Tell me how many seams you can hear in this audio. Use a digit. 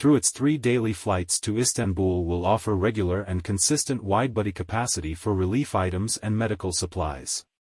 0